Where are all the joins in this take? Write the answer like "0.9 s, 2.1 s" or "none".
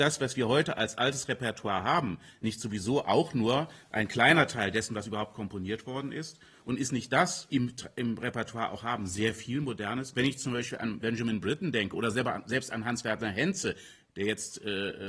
7.5 s